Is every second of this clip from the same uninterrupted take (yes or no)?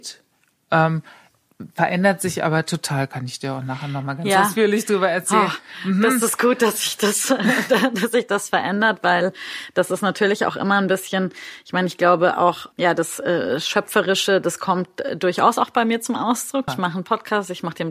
no